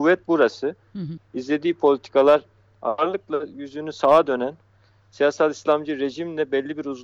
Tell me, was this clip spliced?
yes; 1 cut; at 1.2 s

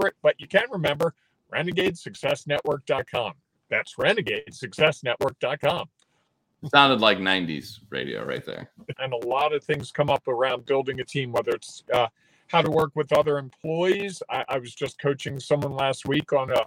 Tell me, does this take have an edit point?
yes; 2 cuts; at 6.6 s, 8.9 s

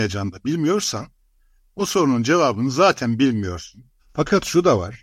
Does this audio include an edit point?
yes; 1 cut; at 4.0 s

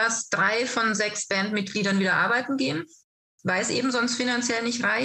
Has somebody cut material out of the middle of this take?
no; 0 cuts

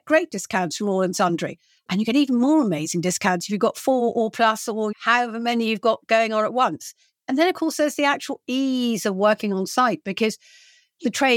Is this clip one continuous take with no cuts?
no; 1 cut; at 4.9 s

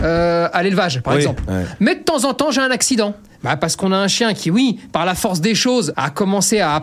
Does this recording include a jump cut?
yes; 2 cuts; at 1.5 s, 5.9 s

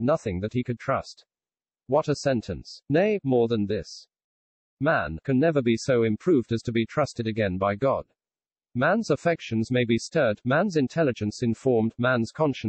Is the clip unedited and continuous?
no; 1 cut; at 5.2 s

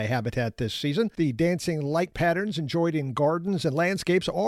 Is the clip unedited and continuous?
no; 1 cut; at 1.1 s

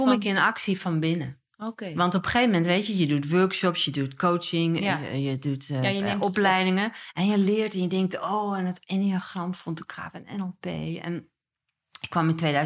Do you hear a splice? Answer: no; 0 cuts

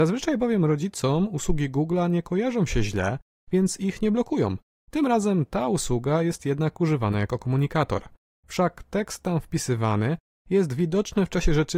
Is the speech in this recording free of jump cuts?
no; 1 cut; at 4.7 s

